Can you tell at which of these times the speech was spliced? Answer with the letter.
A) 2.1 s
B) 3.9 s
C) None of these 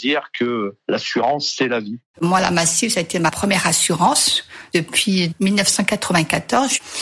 A